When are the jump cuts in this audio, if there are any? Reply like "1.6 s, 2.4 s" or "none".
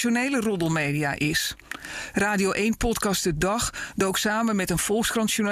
2.1 s